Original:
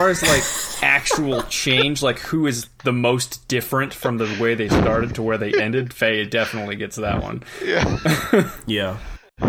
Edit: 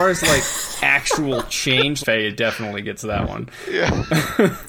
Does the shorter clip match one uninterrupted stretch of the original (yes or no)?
no